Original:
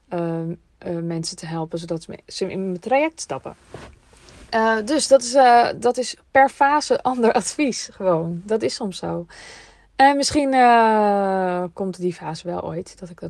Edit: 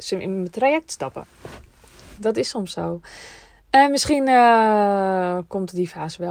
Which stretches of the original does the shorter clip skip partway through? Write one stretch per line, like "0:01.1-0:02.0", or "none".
0:04.5-0:08.4